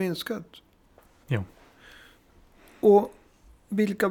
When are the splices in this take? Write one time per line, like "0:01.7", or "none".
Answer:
0:01.2